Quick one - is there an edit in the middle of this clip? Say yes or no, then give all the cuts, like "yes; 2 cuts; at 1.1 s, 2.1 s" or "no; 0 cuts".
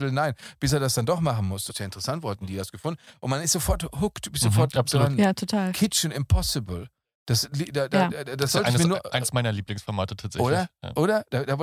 yes; 1 cut; at 1.7 s